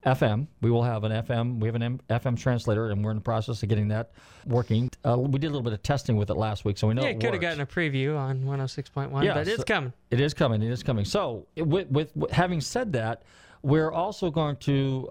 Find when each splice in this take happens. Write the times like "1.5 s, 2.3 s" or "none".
12.1 s